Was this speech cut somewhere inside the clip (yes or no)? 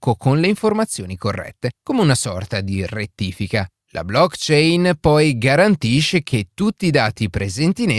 no